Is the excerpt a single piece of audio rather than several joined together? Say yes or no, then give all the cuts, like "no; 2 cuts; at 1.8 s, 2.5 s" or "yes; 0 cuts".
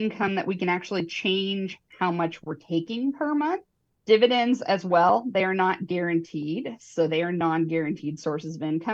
yes; 0 cuts